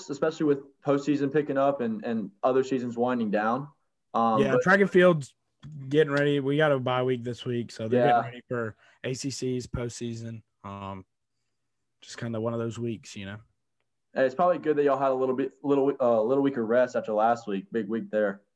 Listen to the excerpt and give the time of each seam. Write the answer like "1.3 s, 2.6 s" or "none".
none